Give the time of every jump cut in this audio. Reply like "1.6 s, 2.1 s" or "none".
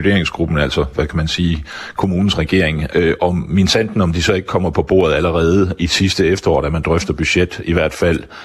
2.9 s

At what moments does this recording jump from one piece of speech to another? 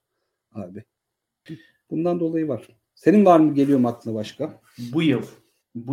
1.5 s

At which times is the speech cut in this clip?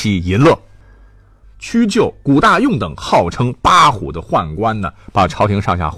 1.4 s

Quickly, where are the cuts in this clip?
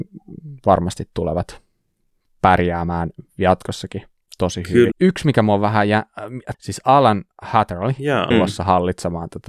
4.9 s, 6.5 s, 8.3 s

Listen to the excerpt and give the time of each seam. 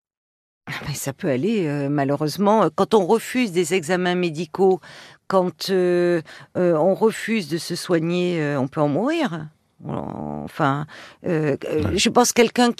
none

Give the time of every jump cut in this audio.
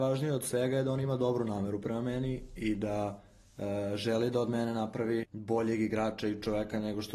5.2 s

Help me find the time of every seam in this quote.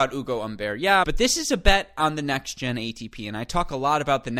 1.0 s

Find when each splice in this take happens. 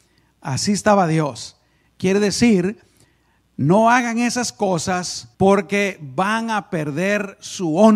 1.8 s, 5.3 s

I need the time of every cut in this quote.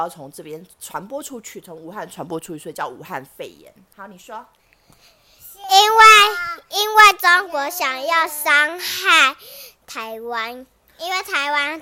none

